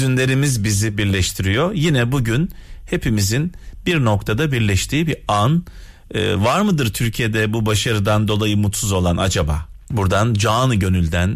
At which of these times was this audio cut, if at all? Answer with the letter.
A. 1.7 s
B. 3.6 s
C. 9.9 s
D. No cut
C